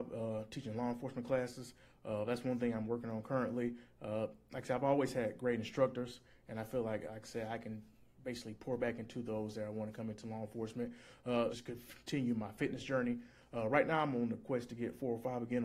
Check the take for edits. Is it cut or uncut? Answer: cut